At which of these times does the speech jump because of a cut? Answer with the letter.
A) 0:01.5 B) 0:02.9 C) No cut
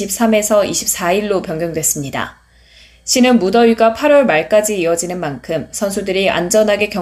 C